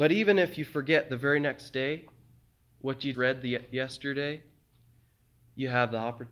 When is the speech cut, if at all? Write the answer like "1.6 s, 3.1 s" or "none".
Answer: 3.1 s